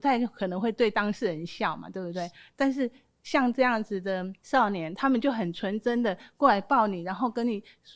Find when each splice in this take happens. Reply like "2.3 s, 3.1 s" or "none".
none